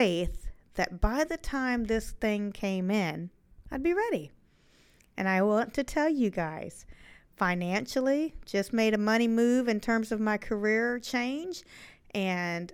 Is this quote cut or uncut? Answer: uncut